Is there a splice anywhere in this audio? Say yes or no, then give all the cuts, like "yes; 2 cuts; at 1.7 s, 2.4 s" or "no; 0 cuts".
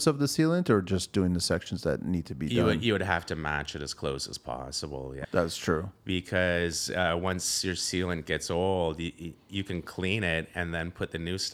yes; 1 cut; at 5.2 s